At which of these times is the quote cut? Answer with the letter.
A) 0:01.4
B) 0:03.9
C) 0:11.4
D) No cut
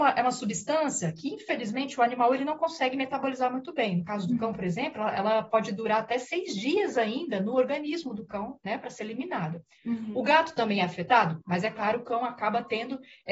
C